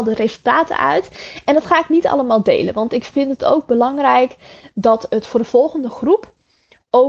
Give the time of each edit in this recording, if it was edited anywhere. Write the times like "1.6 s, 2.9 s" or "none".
none